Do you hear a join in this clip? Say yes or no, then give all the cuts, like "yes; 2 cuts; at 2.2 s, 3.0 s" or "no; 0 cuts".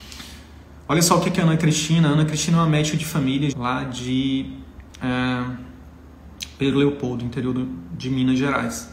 yes; 1 cut; at 3.5 s